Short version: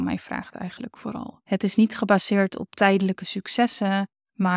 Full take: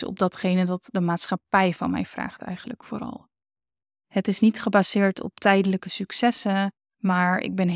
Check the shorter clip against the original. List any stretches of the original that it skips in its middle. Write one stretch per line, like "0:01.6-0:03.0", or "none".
0:03.3-0:04.1